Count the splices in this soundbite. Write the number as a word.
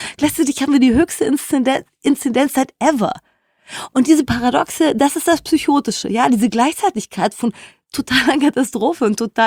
zero